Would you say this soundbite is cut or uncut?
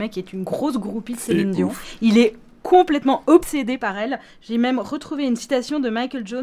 uncut